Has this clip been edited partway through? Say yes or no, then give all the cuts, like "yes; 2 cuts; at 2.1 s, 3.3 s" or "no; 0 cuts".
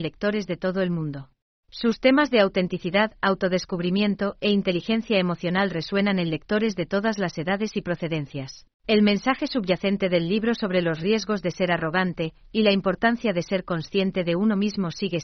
yes; 2 cuts; at 1.5 s, 8.7 s